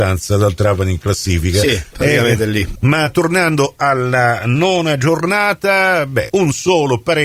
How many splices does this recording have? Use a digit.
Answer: 2